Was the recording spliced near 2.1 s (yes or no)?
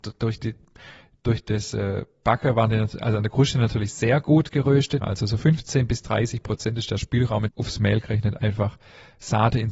no